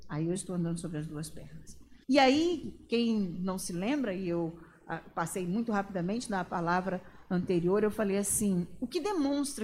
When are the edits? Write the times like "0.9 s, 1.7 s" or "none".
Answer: 2.0 s